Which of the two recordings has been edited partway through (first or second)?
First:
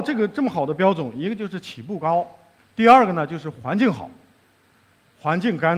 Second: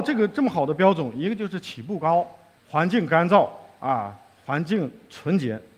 second